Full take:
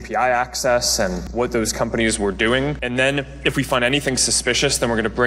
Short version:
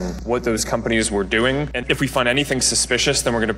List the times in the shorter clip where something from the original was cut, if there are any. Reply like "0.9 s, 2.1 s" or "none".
1.8 s